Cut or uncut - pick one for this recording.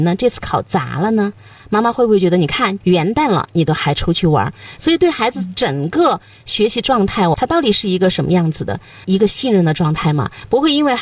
cut